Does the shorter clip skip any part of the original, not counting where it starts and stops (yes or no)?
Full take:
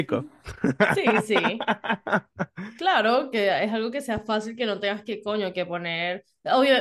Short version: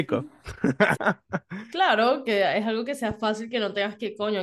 yes